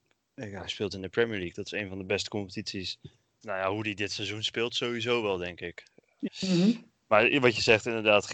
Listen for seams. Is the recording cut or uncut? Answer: cut